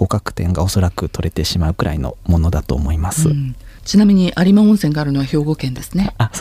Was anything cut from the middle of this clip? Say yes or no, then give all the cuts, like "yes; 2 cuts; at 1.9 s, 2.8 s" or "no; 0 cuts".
no; 0 cuts